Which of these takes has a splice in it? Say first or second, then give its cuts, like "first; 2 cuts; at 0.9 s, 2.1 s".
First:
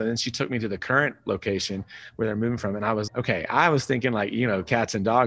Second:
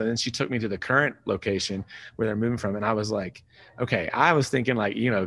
first; 1 cut; at 3.1 s